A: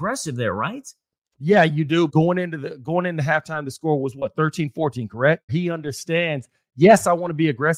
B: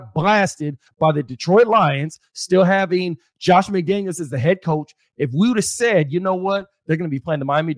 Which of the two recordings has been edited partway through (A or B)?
A